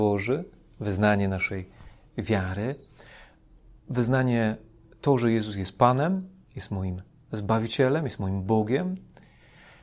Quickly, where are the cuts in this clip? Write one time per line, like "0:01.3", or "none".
none

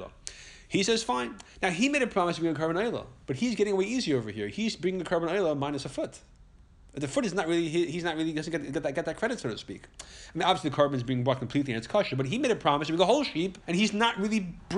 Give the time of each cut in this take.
0:13.6

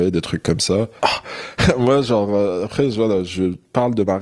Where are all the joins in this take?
0:01.0

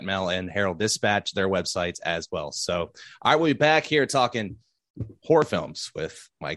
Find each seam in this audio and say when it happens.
none

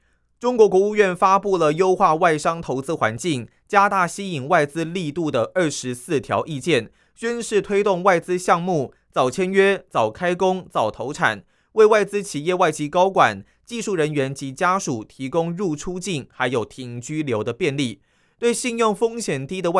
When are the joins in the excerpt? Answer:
0:09.9

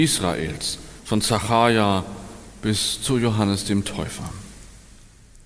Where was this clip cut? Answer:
0:01.0

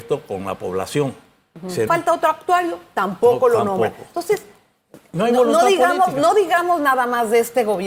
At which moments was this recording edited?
0:01.9

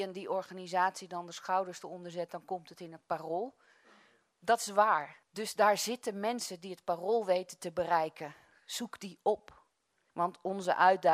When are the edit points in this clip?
0:05.2
0:10.1

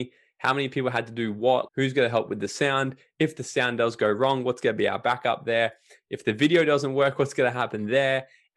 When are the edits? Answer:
0:01.7

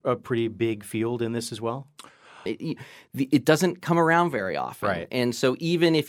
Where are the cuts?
0:02.5

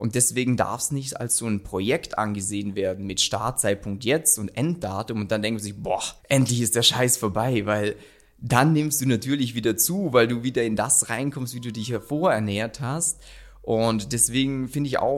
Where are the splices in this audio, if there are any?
0:06.2

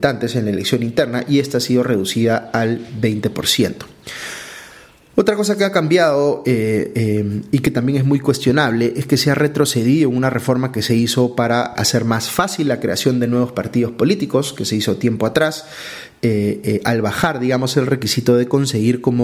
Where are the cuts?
0:11.8

